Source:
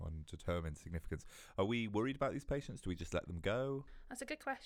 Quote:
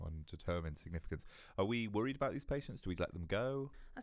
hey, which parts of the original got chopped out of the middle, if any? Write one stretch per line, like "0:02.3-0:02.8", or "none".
0:03.0-0:03.1